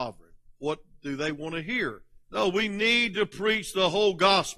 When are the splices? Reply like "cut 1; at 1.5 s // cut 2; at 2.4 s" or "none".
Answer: cut 1; at 2.2 s